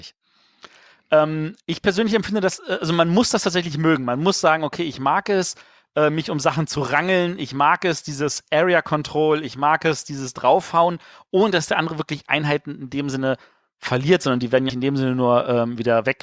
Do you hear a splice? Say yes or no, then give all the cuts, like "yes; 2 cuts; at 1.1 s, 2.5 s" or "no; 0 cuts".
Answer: yes; 1 cut; at 14.7 s